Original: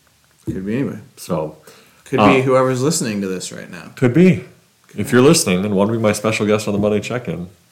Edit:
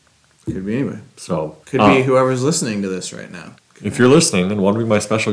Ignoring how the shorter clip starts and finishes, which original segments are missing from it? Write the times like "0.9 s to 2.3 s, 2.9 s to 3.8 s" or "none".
1.6 s to 2.0 s, 3.9 s to 4.7 s